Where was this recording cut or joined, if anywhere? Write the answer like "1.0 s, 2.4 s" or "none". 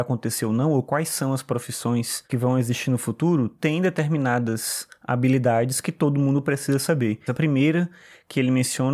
7.3 s